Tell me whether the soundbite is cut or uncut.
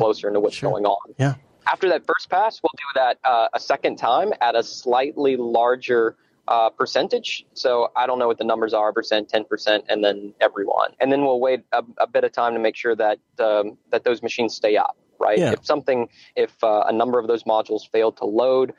cut